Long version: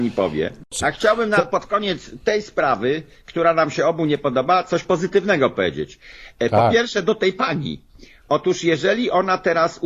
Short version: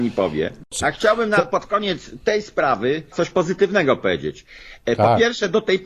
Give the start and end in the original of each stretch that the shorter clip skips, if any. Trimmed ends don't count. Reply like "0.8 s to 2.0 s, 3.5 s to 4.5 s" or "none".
3.1 s to 4.7 s